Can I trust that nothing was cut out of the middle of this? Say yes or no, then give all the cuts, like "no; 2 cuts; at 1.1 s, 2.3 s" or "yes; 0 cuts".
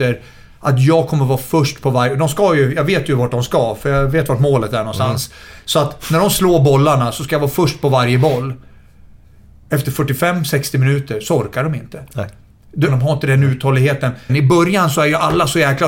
no; 2 cuts; at 12.9 s, 14.3 s